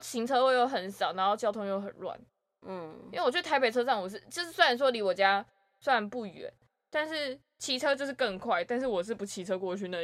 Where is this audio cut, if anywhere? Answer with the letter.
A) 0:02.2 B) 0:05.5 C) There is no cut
C